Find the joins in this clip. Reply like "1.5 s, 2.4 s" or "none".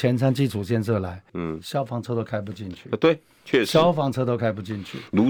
1.3 s